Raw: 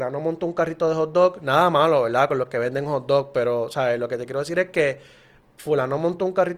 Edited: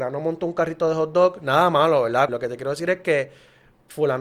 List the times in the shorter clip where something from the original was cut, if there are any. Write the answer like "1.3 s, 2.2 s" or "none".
2.3 s